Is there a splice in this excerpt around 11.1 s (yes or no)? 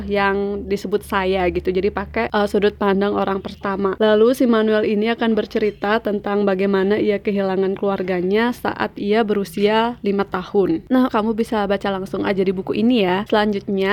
yes